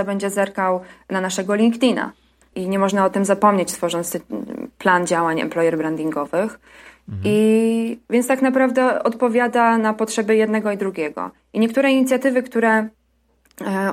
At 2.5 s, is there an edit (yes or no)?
yes